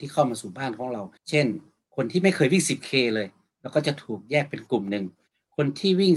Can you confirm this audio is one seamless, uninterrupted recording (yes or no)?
no